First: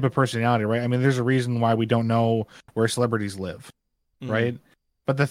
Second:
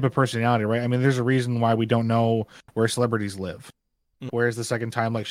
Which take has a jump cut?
second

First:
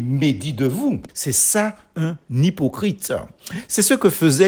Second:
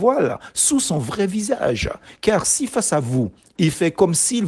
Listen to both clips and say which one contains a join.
first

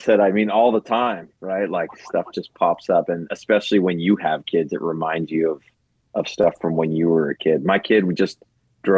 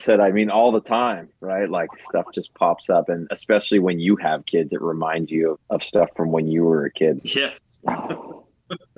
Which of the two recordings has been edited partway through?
second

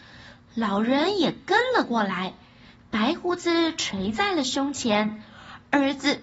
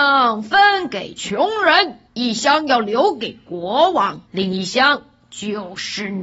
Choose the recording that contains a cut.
second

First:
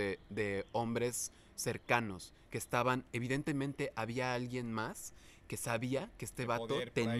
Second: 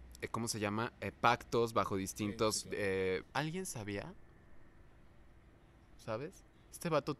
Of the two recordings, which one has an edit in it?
second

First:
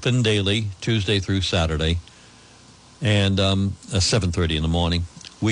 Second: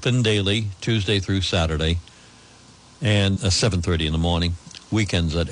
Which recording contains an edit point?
second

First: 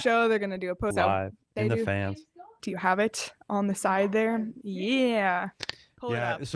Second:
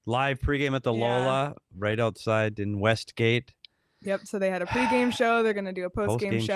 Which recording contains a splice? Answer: first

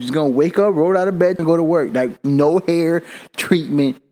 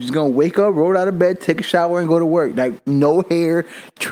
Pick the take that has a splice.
first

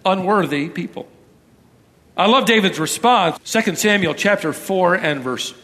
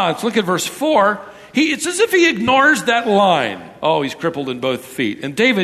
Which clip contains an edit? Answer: first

